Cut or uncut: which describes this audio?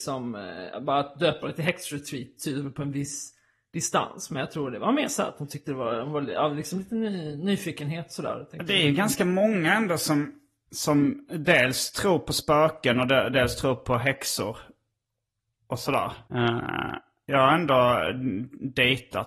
cut